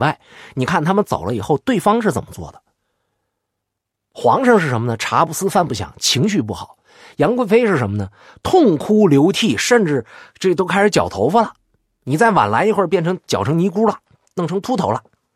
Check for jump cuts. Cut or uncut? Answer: uncut